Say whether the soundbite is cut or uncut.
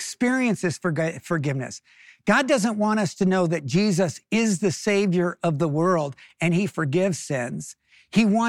cut